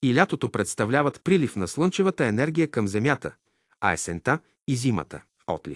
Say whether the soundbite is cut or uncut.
uncut